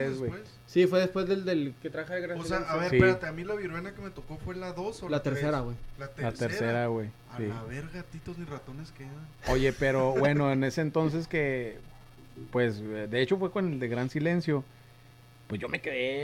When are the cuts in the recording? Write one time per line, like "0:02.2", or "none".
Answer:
none